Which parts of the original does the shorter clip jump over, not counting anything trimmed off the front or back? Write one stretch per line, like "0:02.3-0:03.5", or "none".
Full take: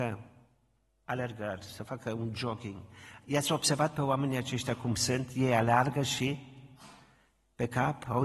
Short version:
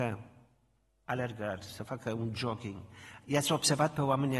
none